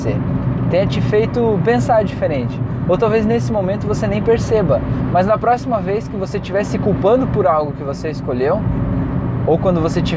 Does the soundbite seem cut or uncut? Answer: uncut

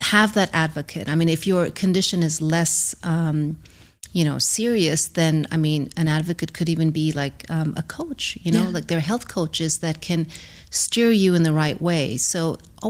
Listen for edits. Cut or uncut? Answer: uncut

